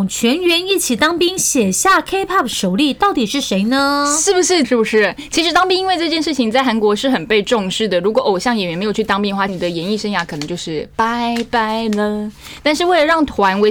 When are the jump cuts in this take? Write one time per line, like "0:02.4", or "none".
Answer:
0:04.6
0:09.5